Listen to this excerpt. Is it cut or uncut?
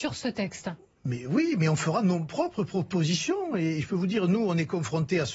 uncut